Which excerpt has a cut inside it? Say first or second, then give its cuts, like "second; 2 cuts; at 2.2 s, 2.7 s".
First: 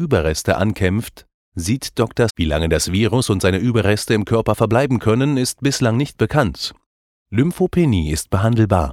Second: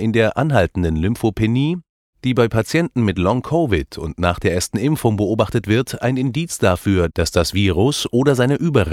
first; 2 cuts; at 2.3 s, 7.1 s